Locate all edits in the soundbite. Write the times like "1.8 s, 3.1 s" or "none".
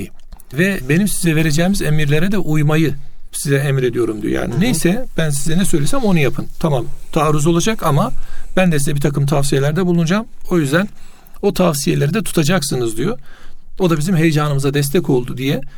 13.8 s